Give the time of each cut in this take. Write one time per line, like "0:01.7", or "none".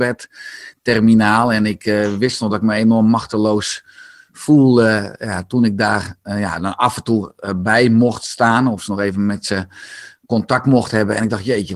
none